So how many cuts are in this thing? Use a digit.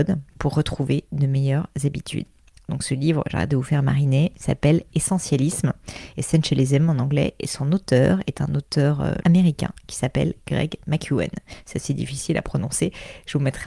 1